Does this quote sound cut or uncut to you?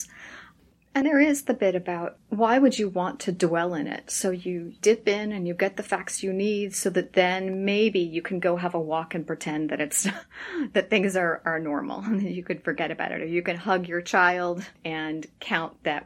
cut